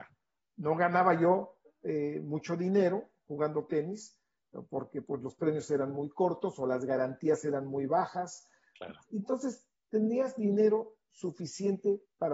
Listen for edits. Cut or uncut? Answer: uncut